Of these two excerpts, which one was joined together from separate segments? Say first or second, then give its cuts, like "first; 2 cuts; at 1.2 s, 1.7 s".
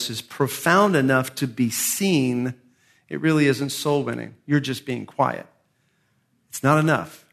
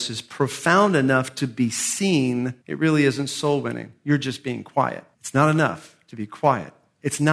second; 2 cuts; at 2.6 s, 5.1 s